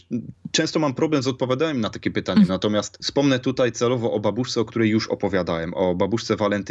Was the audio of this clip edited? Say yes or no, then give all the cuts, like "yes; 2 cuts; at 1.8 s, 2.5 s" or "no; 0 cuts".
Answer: yes; 1 cut; at 2.5 s